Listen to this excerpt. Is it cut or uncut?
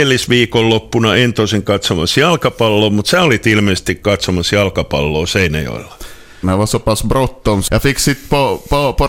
cut